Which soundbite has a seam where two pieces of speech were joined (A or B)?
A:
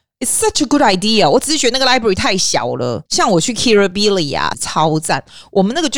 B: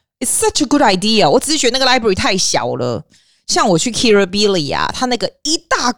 A